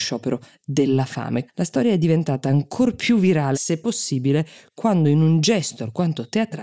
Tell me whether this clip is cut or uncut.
cut